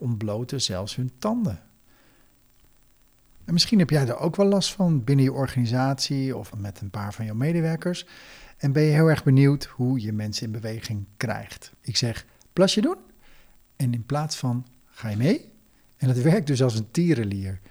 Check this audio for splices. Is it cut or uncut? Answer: cut